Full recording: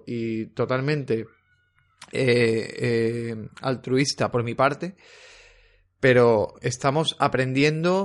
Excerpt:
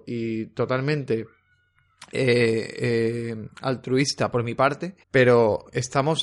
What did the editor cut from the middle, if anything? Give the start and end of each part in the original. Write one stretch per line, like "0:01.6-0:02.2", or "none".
0:05.0-0:05.9

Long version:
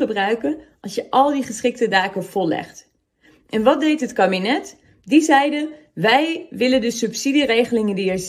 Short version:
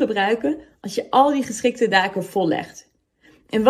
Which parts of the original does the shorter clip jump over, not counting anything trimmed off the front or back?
none

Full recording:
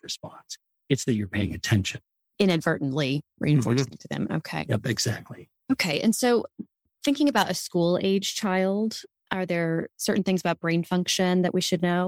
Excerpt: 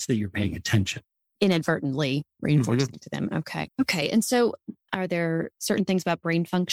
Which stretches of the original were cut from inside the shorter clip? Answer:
0:04.6-0:05.6
0:06.7-0:09.2

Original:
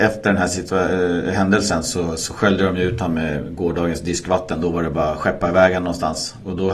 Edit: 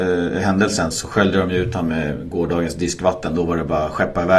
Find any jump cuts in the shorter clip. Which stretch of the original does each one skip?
0:01.8-0:02.2

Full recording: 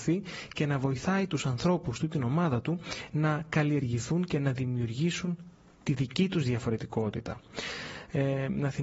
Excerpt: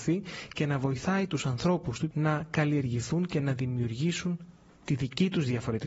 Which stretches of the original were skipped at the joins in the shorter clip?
0:02.1-0:03.1

